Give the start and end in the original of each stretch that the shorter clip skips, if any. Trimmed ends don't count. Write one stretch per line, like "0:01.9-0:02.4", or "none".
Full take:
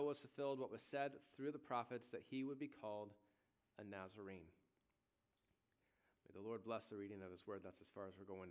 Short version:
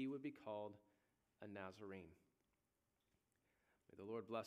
none